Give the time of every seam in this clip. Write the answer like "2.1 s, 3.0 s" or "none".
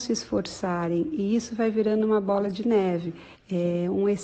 3.3 s